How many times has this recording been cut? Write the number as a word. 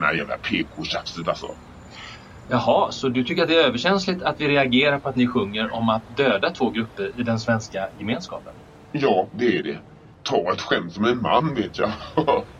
zero